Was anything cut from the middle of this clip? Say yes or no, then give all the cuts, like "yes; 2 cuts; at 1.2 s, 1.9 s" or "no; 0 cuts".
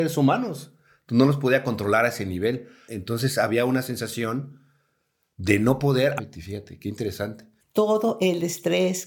yes; 3 cuts; at 2.9 s, 6.2 s, 7.6 s